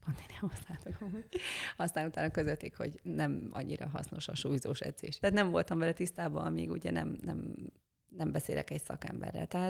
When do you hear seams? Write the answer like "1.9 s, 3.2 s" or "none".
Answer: 5.2 s